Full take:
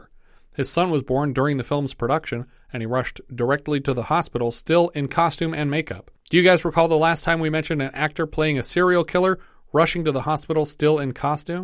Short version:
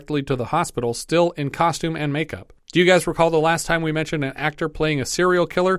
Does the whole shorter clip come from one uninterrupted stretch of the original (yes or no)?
yes